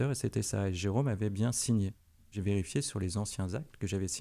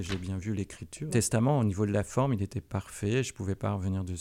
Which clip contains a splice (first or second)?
second